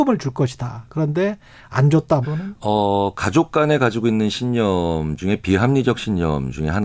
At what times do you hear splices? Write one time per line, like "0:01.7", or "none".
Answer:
0:02.2

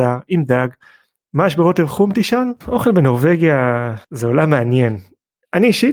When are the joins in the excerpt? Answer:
0:02.6
0:04.0

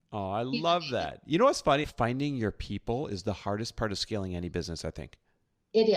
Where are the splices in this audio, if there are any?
0:01.8

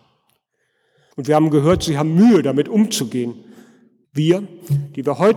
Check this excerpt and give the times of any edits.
0:01.1
0:04.0

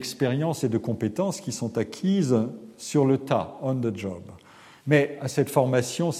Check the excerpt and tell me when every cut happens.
0:04.8

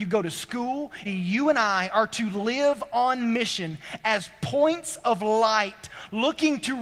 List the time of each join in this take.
0:01.0

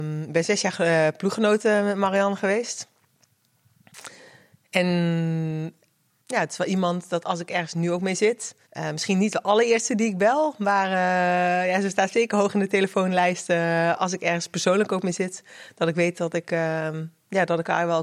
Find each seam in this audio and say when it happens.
0:08.6

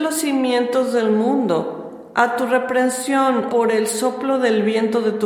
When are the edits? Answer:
0:03.5

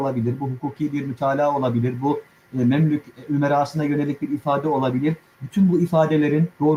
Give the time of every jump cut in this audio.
none

